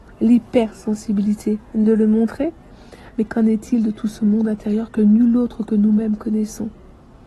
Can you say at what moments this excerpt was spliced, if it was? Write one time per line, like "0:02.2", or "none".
none